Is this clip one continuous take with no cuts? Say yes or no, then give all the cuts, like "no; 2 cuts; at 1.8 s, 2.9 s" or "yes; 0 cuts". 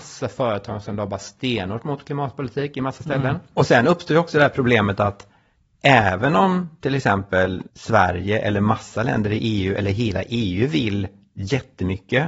no; 1 cut; at 7.7 s